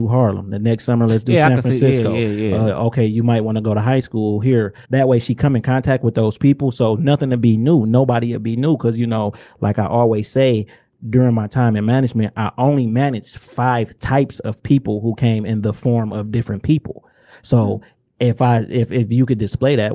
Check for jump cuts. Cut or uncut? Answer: cut